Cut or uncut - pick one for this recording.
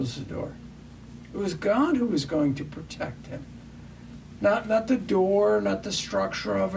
cut